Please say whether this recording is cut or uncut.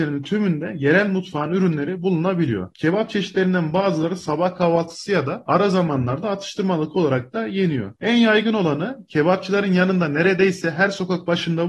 cut